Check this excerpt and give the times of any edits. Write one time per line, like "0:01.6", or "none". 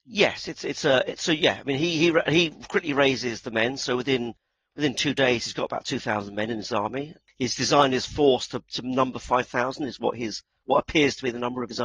none